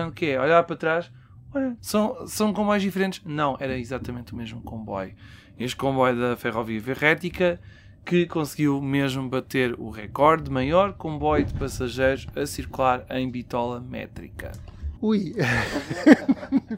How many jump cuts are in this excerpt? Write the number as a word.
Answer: two